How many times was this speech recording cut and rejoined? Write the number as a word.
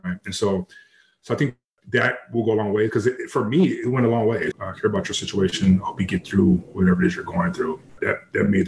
one